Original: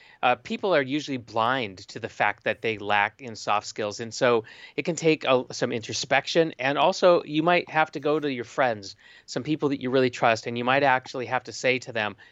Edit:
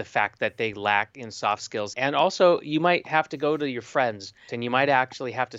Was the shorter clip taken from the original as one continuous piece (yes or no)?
no